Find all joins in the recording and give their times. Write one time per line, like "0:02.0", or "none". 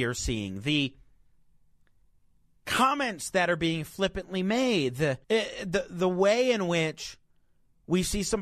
0:05.2